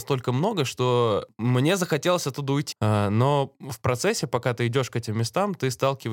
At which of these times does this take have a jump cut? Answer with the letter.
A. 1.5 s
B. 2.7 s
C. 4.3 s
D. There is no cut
B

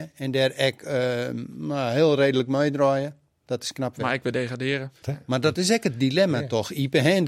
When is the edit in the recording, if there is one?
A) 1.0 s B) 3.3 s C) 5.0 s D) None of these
C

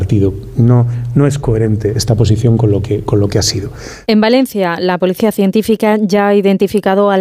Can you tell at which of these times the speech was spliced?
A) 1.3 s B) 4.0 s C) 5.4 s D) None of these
B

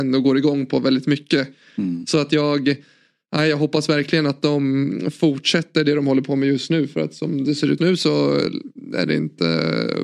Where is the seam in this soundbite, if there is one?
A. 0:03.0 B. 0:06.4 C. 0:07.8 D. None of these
C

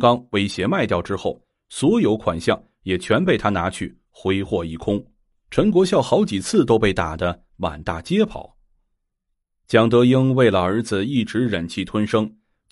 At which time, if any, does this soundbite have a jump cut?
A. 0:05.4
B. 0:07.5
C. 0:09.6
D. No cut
A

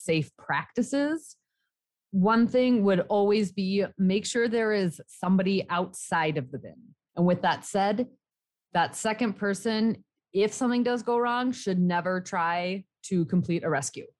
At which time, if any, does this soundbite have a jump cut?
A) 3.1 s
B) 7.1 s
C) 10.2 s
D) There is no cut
B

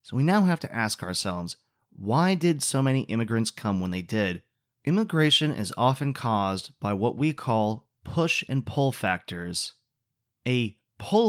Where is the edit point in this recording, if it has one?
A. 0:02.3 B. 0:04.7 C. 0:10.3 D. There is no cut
B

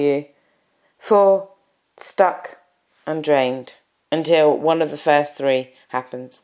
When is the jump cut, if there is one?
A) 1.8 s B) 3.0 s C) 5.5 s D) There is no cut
A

